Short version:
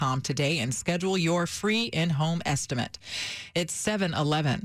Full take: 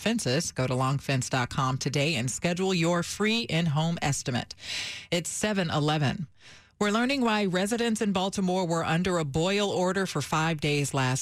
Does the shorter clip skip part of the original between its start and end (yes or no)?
no